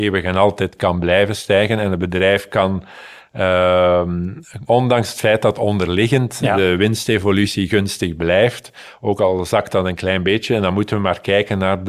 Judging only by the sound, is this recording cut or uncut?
cut